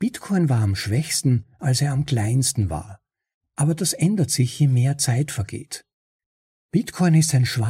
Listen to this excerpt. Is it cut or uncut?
uncut